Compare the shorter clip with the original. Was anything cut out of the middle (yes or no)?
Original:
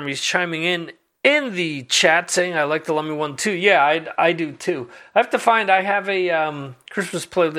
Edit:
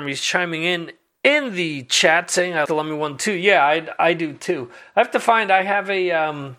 yes